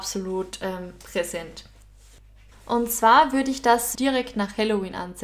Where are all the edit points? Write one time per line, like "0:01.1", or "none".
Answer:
0:02.5
0:03.9